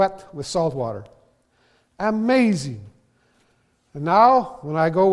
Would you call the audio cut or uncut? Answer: uncut